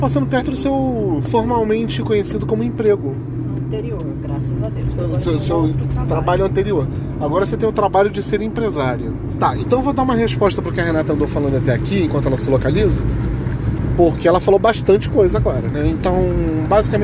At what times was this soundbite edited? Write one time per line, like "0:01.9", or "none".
0:09.4